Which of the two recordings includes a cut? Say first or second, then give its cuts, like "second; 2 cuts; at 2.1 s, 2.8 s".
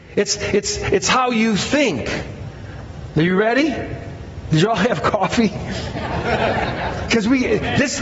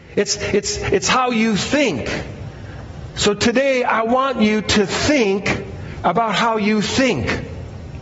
first; 1 cut; at 3.1 s